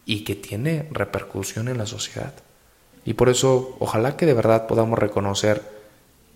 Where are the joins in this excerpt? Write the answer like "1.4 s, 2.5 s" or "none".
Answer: 2.9 s